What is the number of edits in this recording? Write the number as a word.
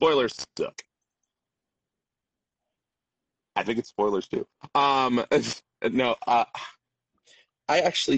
one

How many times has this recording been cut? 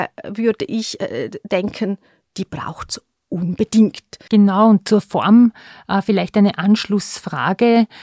one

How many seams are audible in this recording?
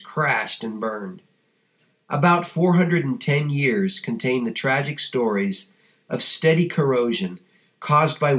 zero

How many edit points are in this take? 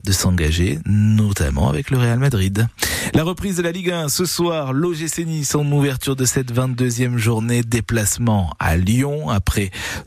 zero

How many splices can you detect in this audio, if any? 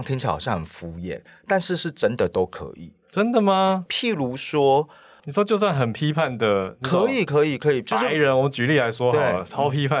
one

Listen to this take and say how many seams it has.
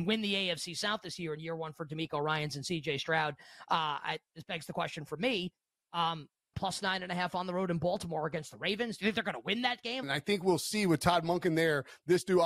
two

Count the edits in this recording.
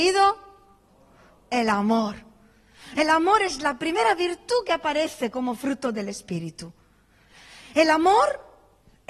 zero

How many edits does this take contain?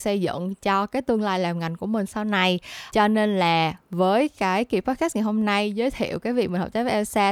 one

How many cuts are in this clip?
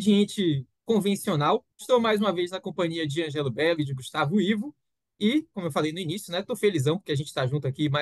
one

